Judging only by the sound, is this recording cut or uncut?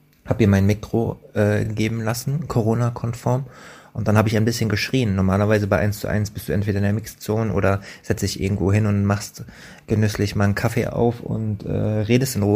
uncut